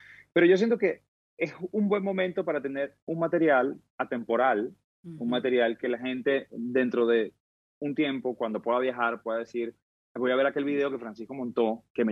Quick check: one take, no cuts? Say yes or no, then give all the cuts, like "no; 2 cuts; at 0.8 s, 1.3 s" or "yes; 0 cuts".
yes; 0 cuts